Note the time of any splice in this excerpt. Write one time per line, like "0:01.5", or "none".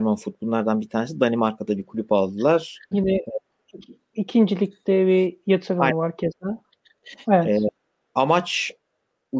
0:02.9
0:07.2